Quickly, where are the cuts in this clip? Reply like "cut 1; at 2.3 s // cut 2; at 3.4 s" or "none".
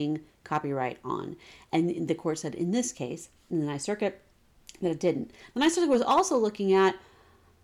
cut 1; at 5.5 s